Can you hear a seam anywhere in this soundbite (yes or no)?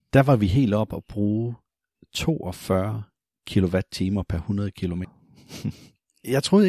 yes